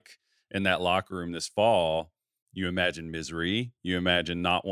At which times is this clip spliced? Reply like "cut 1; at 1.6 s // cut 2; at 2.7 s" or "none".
none